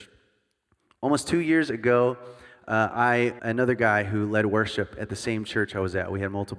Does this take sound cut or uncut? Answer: cut